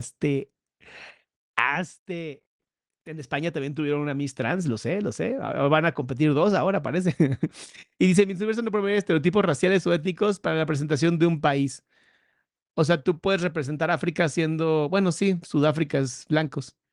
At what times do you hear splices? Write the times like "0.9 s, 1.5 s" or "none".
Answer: none